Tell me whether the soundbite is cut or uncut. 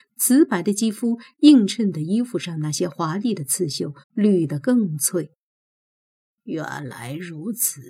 cut